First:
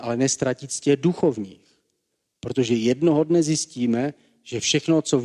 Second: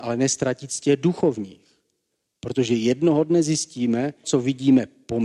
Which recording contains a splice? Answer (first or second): second